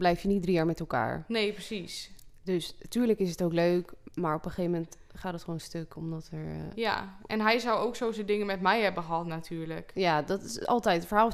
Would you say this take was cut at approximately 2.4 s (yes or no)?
no